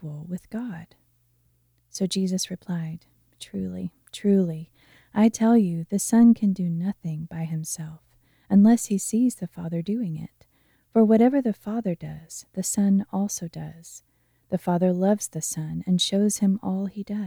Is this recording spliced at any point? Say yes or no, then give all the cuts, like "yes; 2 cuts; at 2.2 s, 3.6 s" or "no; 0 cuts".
no; 0 cuts